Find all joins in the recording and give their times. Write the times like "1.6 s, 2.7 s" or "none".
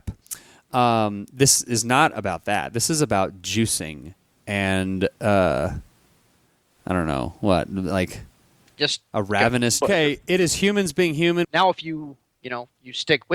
9.8 s, 11.4 s